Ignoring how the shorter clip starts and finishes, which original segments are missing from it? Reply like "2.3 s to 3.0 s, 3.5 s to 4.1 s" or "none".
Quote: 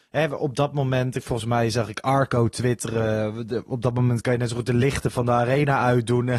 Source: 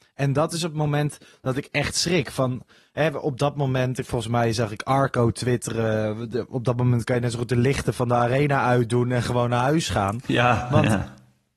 none